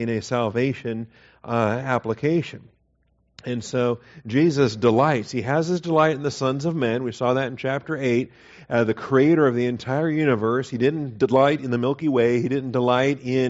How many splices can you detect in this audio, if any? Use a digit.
0